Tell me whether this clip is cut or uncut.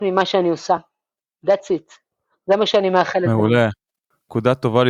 uncut